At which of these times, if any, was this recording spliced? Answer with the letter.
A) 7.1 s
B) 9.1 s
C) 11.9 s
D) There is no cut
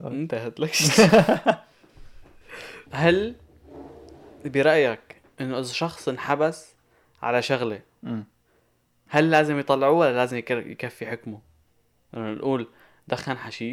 B